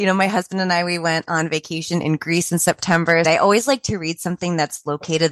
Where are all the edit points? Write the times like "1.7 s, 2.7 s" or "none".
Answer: 3.2 s